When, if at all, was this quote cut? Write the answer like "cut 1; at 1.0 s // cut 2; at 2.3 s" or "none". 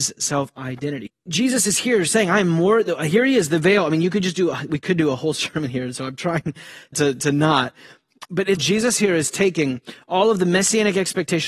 cut 1; at 1.1 s // cut 2; at 6.9 s // cut 3; at 8.6 s

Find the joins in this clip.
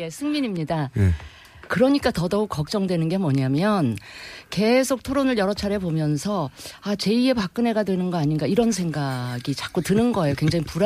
cut 1; at 1.7 s

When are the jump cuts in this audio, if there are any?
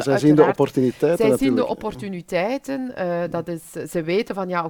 none

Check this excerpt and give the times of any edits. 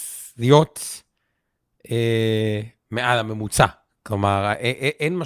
none

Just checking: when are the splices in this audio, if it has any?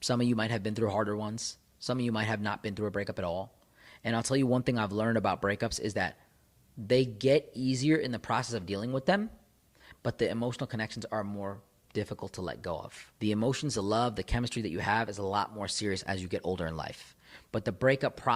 cut 1; at 13.1 s

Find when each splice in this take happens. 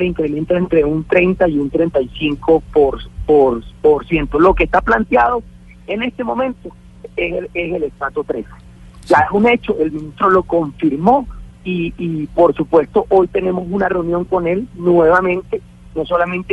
cut 1; at 7.0 s // cut 2; at 11.5 s

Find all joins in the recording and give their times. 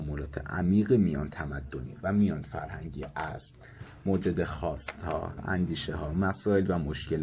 cut 1; at 5.4 s

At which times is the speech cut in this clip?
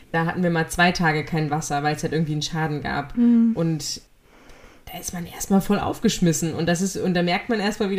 none

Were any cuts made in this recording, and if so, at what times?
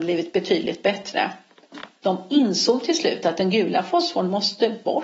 cut 1; at 2.0 s

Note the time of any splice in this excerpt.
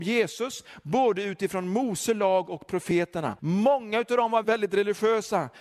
cut 1; at 3.4 s // cut 2; at 4.4 s

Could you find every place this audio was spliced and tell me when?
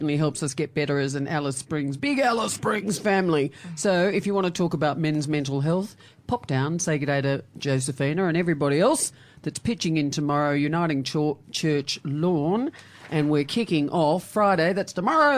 none

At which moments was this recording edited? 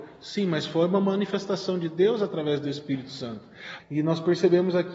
cut 1; at 3.8 s

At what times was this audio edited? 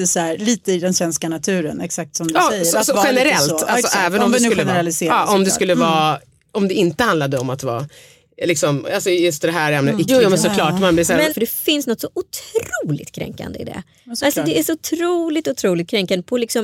cut 1; at 10.1 s // cut 2; at 11.3 s

